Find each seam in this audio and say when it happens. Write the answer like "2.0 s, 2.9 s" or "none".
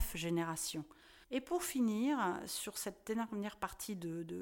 1.2 s